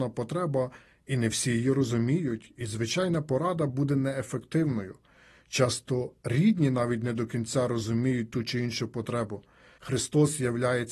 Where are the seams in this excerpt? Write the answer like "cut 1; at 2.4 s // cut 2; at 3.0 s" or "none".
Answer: cut 1; at 9.8 s

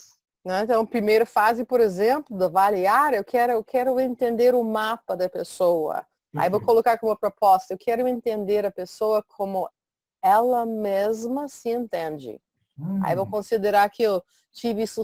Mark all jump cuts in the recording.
none

